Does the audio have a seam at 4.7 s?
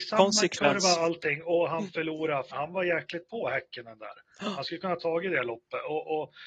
no; 1 cut; at 2.5 s

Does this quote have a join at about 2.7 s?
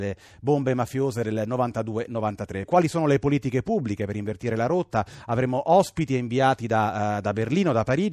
yes; 1 cut; at 2.7 s

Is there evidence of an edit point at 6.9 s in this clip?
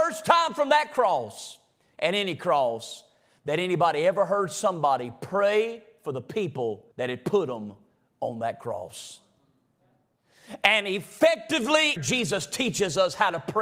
yes; 2 cuts; at 6.9 s, 12.0 s

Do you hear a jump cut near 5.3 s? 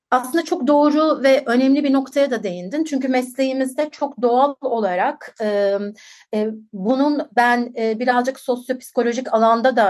no; 0 cuts

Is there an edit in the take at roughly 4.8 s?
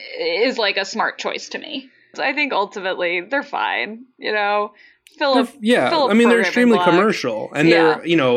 no; 1 cut; at 2.1 s

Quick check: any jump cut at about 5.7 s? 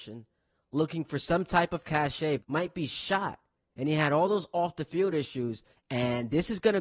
yes; 2 cuts; at 2.4 s, 5.7 s

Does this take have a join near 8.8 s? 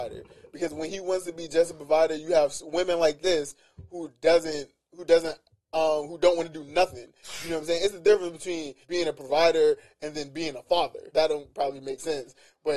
yes; 2 cuts; at 8.8 s, 11.1 s

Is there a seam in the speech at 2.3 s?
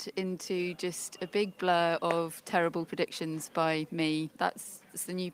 no; 1 cut; at 4.3 s

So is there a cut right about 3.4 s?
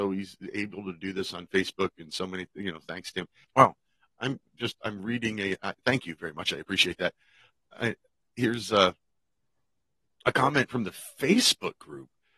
yes; 1 cut; at 3.4 s

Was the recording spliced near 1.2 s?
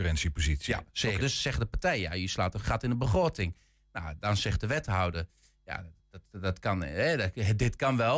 yes; 1 cut; at 1.2 s

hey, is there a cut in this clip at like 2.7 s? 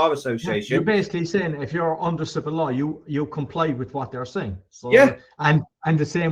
no; 0 cuts

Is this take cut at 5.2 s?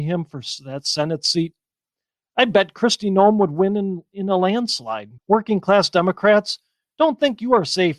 yes; 1 cut; at 5.2 s

